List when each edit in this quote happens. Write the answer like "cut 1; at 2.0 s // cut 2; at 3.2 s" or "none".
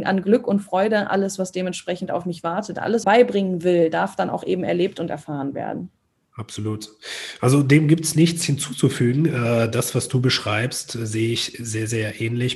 cut 1; at 3.0 s